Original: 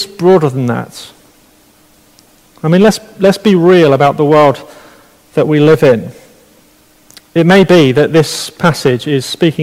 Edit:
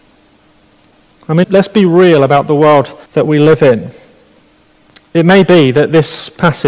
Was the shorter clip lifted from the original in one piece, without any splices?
no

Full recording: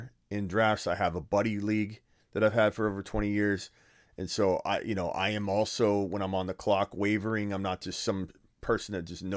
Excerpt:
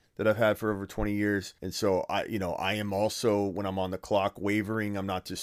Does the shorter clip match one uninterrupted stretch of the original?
no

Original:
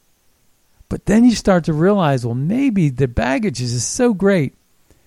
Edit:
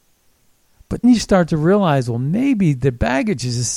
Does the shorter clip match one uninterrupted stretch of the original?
no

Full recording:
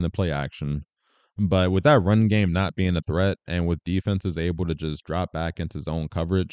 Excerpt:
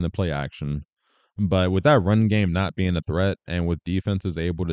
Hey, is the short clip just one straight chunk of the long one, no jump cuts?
yes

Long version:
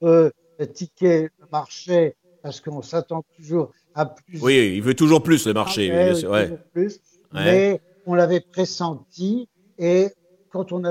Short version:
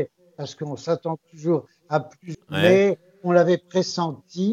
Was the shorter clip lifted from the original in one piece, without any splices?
no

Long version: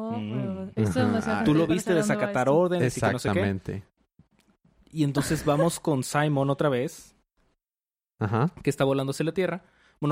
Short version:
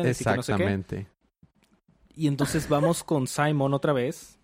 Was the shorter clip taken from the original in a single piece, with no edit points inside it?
yes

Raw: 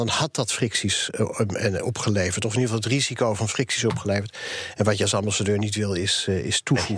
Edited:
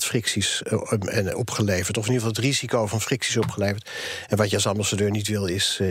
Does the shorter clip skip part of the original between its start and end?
no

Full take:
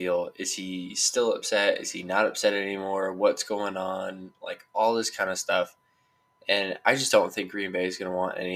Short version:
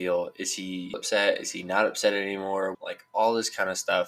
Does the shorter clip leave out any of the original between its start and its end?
yes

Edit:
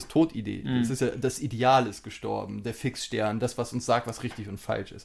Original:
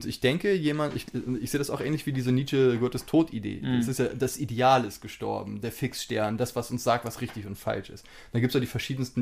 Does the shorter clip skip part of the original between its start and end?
no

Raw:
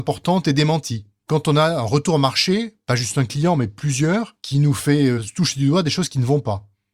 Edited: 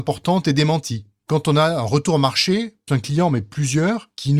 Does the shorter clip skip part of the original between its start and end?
yes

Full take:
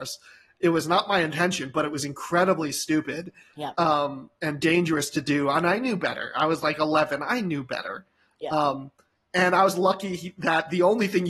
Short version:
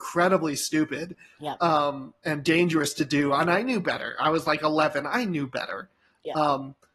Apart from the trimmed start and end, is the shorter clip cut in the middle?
no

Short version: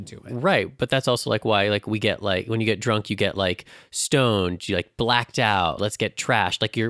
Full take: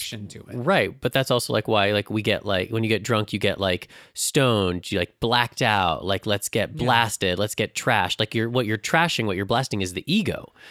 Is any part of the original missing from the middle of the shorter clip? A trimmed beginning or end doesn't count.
yes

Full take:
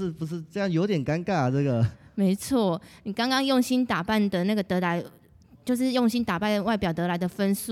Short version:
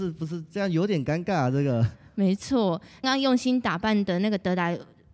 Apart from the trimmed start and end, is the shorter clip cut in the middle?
yes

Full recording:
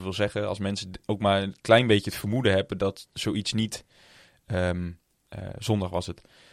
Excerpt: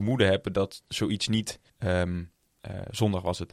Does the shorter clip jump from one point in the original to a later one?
yes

